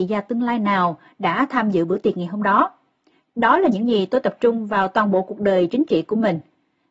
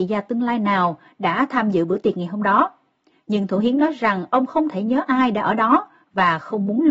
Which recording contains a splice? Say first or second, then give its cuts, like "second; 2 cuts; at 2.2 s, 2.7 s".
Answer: first; 1 cut; at 3.3 s